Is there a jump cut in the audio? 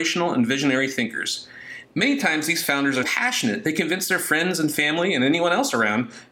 yes; 2 cuts; at 1.8 s, 3.0 s

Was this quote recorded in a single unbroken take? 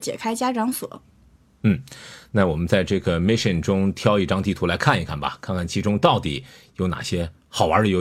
yes; 0 cuts

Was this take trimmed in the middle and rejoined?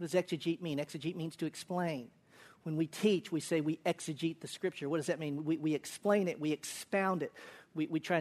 no; 0 cuts

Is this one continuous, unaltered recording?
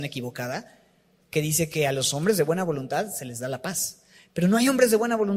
yes; 0 cuts

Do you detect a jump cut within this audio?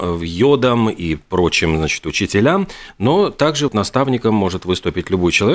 yes; 1 cut; at 3.7 s

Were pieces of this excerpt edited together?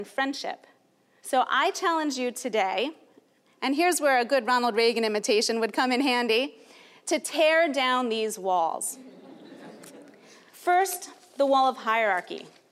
yes; 2 cuts; at 1.2 s, 10.5 s

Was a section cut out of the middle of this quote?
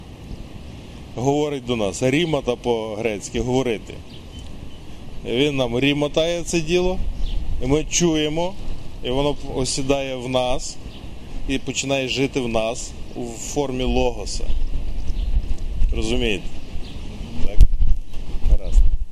no; 0 cuts

